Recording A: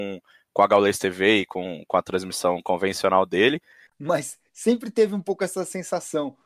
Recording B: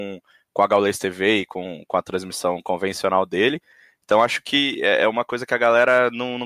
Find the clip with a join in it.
A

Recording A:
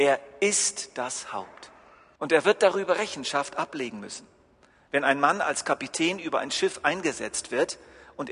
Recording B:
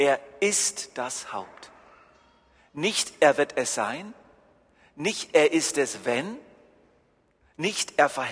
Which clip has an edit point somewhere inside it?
A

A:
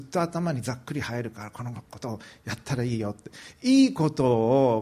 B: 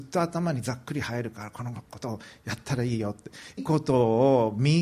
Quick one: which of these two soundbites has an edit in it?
B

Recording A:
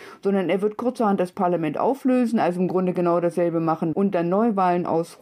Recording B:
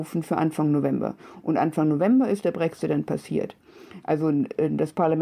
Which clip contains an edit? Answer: A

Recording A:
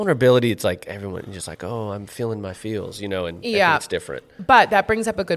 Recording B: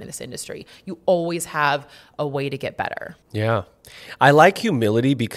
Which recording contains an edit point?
B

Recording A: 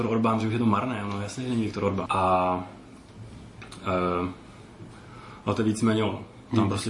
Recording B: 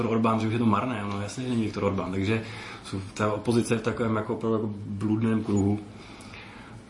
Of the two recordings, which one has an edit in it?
A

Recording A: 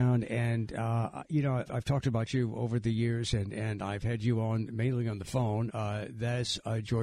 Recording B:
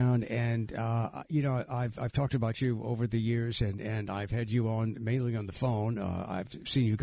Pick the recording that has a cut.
A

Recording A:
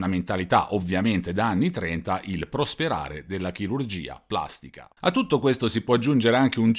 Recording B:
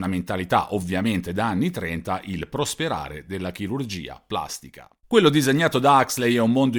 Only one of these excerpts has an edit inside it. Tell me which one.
A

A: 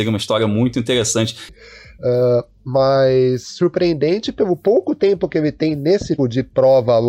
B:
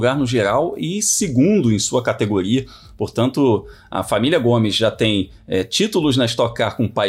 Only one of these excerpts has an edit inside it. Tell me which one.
A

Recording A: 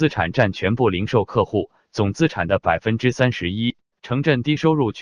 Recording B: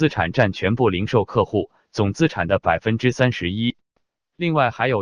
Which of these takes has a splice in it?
A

